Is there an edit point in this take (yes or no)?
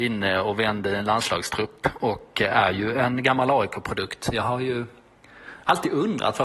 no